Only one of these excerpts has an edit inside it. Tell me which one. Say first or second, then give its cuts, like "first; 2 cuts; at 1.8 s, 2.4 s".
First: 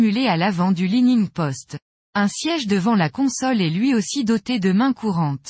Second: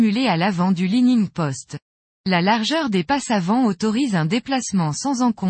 second; 1 cut; at 2.0 s